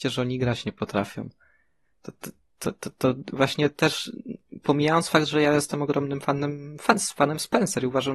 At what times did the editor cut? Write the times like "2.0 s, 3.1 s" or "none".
none